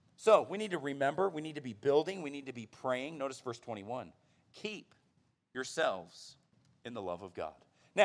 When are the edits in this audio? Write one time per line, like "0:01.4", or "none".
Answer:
none